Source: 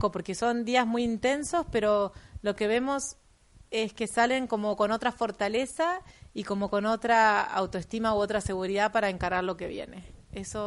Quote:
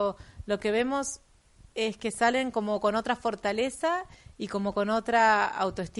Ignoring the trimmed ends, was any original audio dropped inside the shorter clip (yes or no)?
no